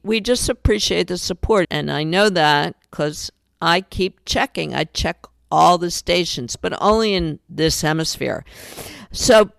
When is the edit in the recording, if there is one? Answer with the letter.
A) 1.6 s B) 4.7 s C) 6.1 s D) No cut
A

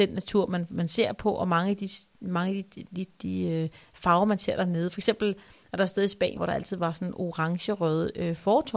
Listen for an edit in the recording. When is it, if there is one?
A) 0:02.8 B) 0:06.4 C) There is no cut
B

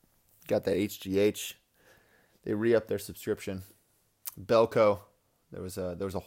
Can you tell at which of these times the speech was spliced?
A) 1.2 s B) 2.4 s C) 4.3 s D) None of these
D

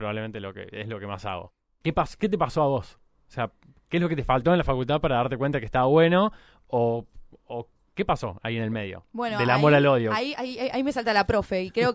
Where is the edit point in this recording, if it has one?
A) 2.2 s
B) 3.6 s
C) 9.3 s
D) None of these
D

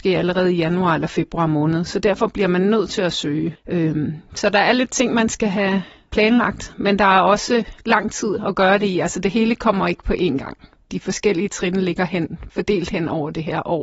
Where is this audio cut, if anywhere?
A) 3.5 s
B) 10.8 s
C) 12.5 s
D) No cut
A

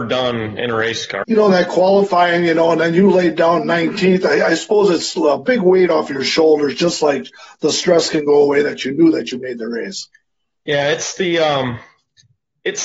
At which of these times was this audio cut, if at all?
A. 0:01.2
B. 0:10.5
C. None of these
A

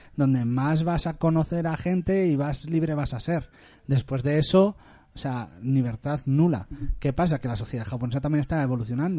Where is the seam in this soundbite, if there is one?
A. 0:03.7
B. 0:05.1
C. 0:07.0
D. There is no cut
D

